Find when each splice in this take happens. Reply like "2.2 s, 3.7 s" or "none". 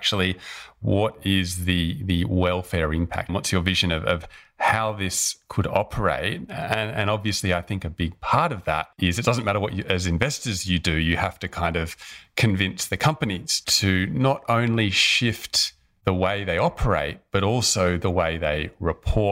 3.3 s, 8.9 s